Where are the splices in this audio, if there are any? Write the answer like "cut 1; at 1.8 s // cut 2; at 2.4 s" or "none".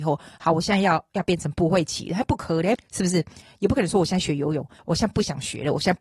cut 1; at 2.8 s // cut 2; at 4.8 s